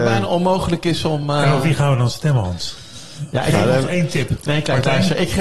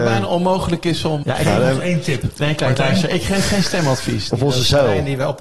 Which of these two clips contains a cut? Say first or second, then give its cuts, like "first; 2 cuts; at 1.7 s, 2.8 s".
second; 2 cuts; at 1.2 s, 4.3 s